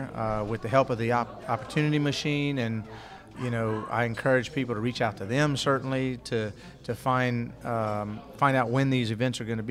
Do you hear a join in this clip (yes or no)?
yes